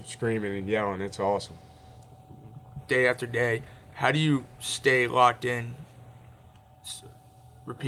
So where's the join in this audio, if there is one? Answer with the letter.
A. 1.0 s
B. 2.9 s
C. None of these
B